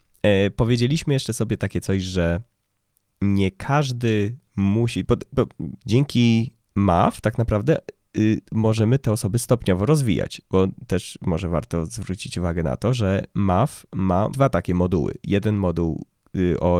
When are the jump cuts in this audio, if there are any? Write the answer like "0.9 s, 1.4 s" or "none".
5.8 s, 14.3 s